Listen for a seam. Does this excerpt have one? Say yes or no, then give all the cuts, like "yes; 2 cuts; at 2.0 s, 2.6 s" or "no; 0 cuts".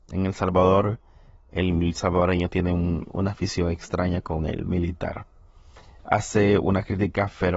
no; 0 cuts